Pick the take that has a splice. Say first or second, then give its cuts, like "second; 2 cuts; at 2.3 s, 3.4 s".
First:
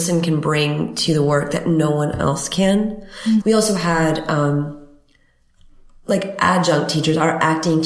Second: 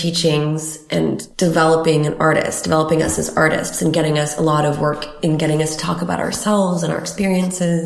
first; 1 cut; at 3.4 s